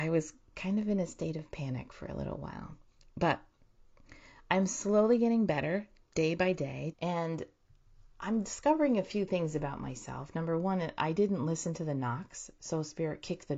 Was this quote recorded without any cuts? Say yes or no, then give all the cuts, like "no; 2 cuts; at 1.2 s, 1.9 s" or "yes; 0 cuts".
no; 1 cut; at 6.9 s